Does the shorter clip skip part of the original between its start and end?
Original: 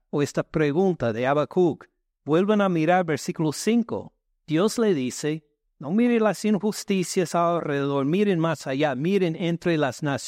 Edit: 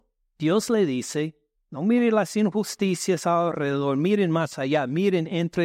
no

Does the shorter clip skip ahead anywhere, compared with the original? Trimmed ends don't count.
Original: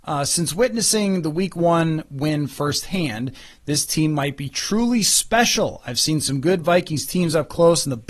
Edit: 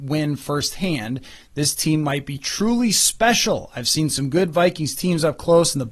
no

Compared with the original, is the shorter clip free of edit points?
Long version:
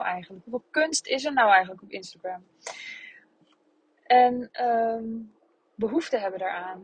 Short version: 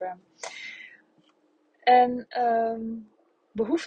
yes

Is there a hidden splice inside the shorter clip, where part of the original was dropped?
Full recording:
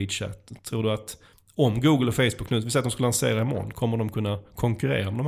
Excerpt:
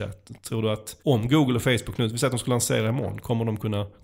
yes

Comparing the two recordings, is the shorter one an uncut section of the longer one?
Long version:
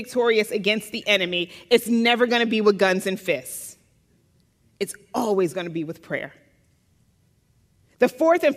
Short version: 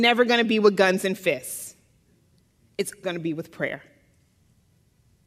no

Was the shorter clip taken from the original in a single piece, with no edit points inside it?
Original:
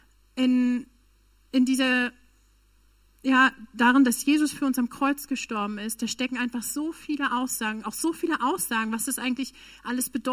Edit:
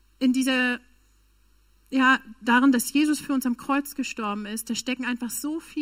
yes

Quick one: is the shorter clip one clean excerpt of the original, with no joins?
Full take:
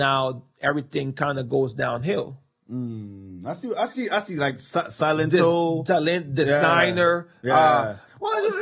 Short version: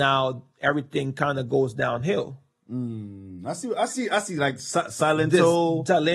yes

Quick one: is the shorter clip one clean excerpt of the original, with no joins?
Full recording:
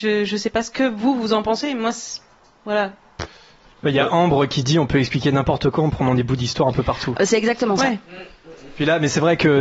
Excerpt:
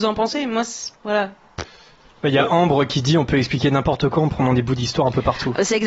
no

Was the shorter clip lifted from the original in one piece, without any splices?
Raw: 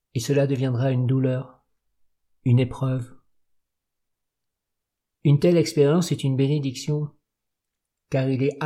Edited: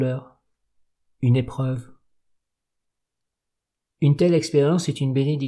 yes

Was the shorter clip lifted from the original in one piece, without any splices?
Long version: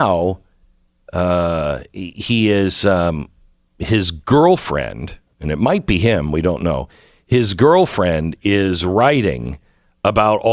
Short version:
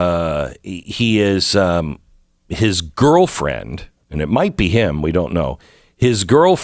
yes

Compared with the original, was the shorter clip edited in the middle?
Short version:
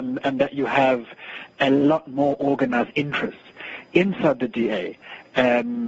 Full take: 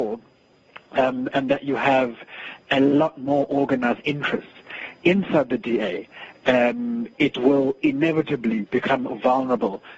no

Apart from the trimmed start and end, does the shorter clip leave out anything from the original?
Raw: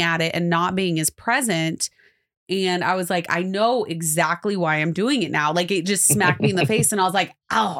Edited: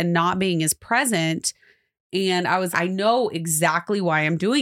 yes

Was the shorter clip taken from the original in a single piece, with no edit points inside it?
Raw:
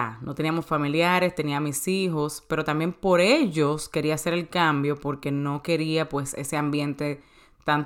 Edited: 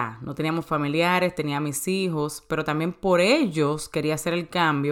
yes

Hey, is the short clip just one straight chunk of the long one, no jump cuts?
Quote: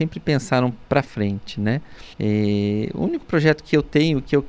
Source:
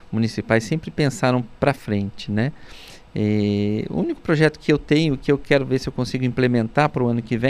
no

